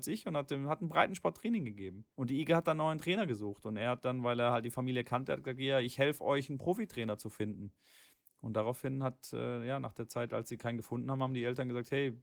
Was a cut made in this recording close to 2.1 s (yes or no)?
yes